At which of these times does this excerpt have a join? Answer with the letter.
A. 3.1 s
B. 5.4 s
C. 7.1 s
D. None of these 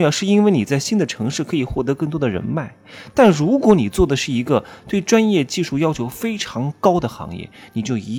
D